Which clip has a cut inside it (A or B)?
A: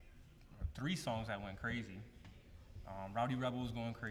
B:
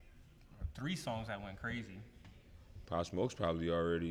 B